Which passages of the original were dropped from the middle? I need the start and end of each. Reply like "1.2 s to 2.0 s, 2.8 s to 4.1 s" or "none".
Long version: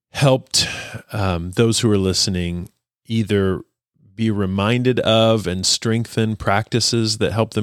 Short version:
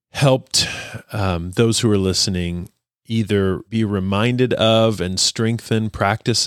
3.7 s to 4.1 s